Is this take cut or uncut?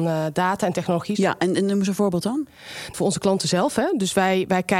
cut